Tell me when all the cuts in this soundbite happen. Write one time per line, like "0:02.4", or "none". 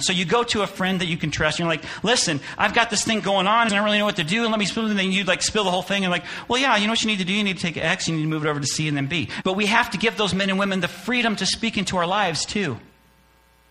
0:03.7
0:09.4